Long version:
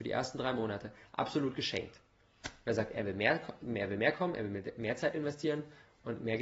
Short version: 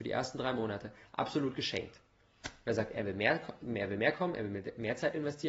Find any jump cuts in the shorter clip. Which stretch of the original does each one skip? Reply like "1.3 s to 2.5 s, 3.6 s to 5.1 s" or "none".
none